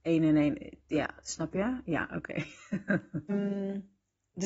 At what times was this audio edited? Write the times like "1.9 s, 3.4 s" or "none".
3.3 s